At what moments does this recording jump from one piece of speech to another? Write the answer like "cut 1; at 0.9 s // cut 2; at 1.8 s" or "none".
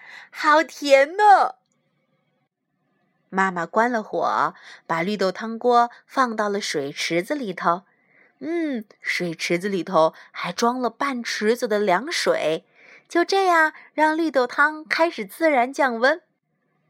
none